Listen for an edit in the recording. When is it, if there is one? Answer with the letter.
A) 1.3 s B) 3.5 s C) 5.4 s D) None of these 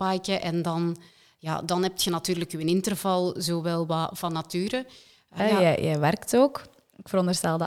C